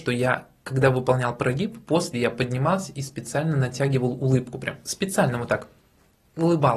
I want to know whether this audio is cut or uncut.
uncut